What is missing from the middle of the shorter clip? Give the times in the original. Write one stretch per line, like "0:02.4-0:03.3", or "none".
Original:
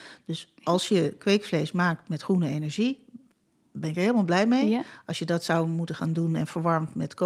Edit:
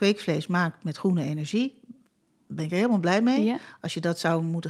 none